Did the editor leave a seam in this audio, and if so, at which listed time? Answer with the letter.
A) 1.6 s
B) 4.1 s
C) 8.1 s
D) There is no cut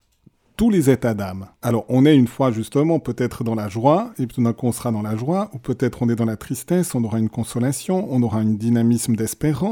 A